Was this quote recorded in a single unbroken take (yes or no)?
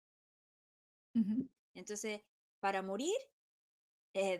no